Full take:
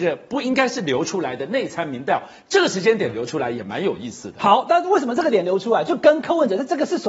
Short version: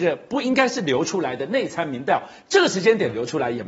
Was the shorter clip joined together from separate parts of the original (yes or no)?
no